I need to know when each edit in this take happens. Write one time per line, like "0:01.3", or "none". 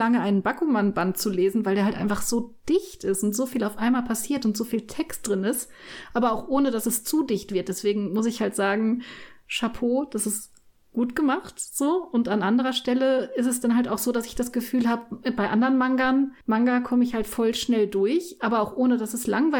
0:16.4

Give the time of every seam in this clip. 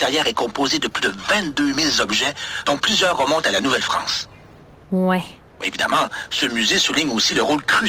0:05.6

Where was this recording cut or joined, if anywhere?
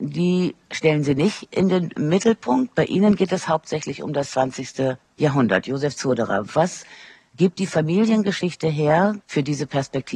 0:09.2

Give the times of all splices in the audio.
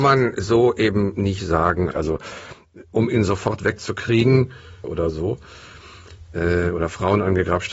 0:01.9
0:04.8

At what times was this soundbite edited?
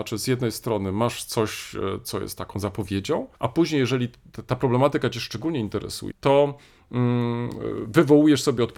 0:03.3
0:06.1

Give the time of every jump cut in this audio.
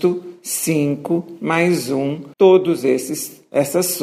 0:02.3

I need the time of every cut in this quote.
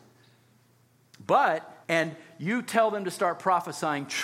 0:01.8

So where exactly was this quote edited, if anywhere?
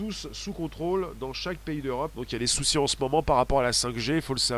0:02.1

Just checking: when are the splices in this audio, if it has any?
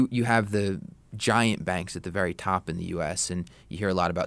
none

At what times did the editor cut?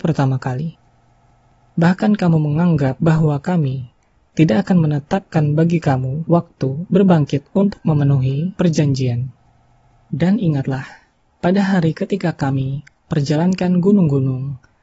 0:10.0

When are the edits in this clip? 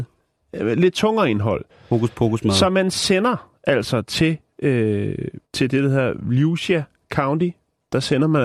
0:05.4

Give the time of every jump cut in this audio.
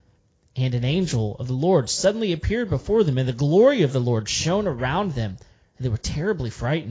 none

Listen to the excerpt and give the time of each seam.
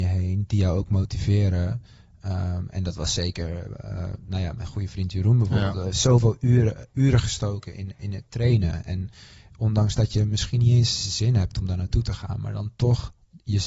none

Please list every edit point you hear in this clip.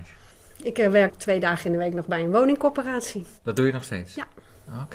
0:03.4

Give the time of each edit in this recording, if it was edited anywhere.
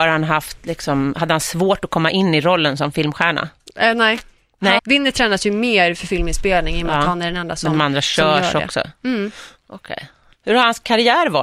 0:04.8

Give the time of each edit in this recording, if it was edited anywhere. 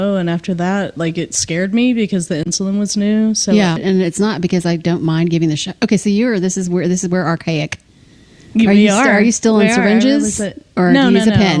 0:03.8

